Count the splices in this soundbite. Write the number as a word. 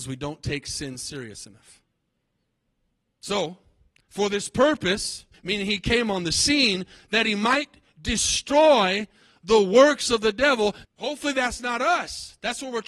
two